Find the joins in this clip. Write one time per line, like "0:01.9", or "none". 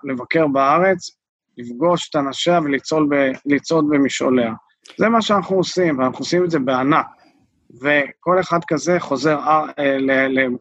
none